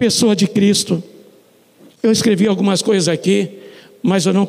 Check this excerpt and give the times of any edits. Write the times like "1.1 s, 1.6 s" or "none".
1.9 s